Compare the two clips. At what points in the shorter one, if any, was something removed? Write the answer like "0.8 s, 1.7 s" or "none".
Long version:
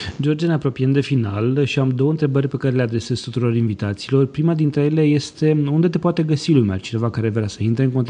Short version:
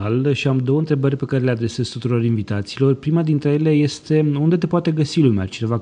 none